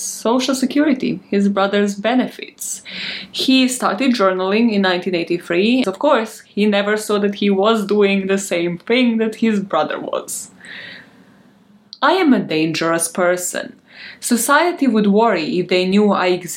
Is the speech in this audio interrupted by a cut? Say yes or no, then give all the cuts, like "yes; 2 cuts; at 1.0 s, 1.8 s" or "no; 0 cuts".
yes; 1 cut; at 5.8 s